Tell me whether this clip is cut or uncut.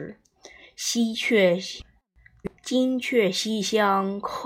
cut